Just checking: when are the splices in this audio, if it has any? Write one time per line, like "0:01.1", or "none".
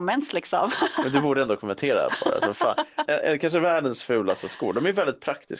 0:03.1